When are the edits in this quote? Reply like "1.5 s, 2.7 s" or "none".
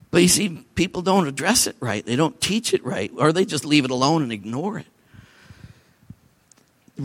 none